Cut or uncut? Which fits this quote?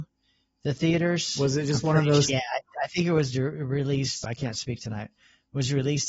cut